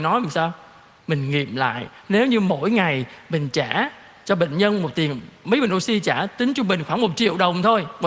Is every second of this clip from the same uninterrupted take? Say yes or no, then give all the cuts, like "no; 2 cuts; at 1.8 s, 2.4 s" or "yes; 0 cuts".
yes; 0 cuts